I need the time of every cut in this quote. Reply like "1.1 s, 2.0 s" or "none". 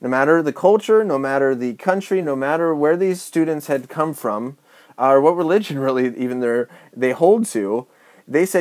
none